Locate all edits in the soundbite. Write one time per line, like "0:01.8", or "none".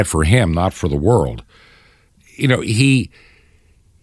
none